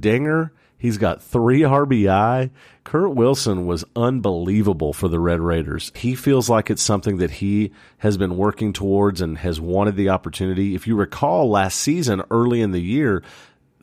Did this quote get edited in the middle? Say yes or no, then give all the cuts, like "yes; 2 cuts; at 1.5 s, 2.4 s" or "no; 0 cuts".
yes; 1 cut; at 5.9 s